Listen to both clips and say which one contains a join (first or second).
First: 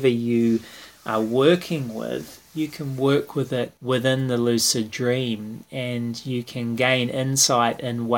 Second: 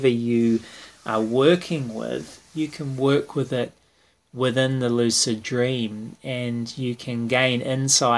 first